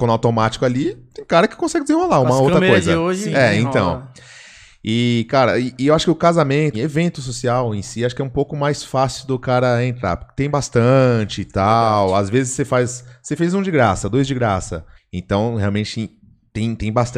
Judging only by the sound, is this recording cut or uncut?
cut